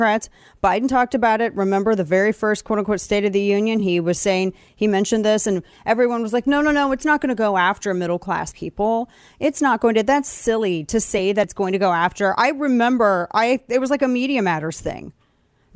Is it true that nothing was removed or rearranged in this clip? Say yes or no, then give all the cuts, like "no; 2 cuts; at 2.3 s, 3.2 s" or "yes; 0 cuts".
yes; 0 cuts